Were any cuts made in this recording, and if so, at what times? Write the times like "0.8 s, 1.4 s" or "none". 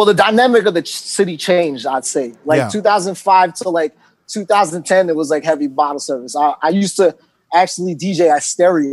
none

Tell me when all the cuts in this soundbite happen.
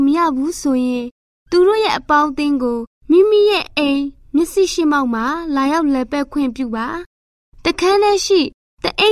none

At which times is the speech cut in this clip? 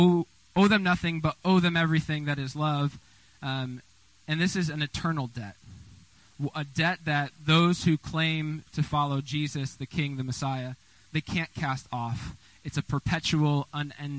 11.1 s

